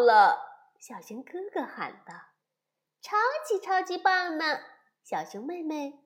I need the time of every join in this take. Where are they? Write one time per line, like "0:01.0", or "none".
none